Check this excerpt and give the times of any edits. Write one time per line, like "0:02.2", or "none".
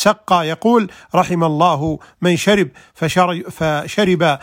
none